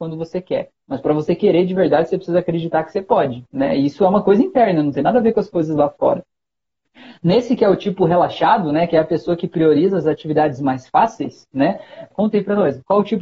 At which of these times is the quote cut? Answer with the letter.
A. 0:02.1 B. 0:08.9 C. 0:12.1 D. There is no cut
C